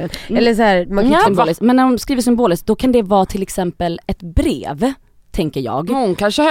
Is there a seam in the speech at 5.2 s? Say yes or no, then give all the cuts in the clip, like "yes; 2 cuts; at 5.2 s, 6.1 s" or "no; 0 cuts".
no; 1 cut; at 1.2 s